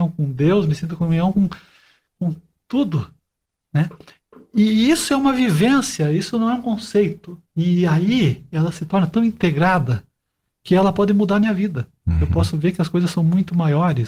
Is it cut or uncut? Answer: uncut